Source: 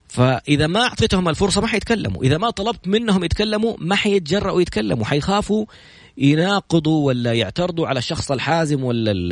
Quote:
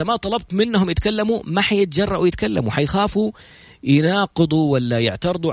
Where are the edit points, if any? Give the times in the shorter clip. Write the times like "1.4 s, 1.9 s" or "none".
none